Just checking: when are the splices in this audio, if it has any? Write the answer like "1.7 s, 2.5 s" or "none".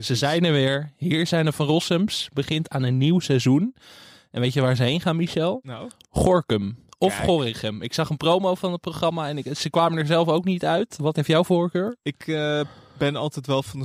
none